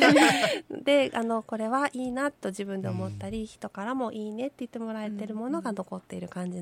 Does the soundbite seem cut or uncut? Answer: uncut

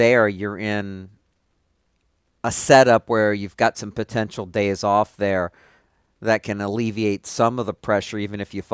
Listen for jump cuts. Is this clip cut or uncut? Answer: uncut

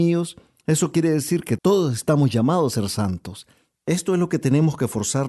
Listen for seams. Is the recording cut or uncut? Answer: cut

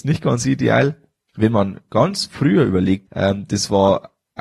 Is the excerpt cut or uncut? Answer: cut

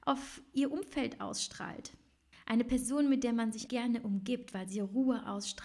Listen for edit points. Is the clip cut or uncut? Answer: cut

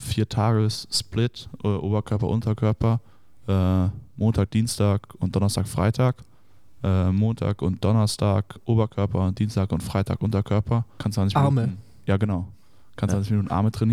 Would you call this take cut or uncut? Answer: cut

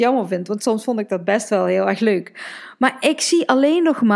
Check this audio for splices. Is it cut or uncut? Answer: uncut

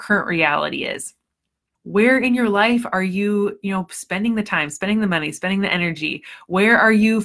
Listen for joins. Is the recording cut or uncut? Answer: cut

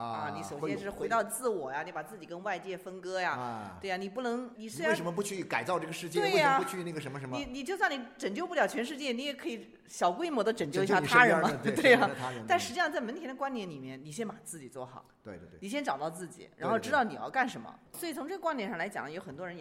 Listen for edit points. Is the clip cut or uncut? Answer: cut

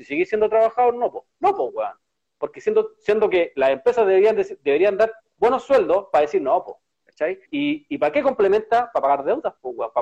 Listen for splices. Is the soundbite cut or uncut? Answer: cut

